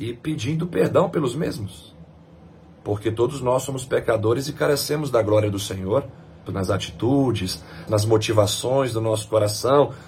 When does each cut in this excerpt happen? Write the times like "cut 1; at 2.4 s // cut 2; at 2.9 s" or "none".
cut 1; at 6.5 s // cut 2; at 7.9 s

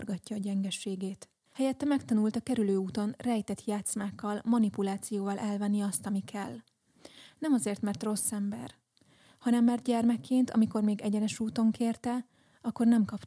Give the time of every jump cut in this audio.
cut 1; at 1.5 s

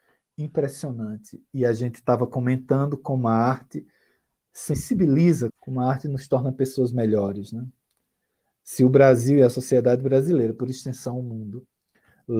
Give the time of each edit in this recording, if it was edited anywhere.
cut 1; at 5.5 s

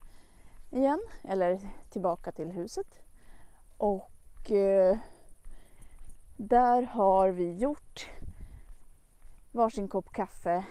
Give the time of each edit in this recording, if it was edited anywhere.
none

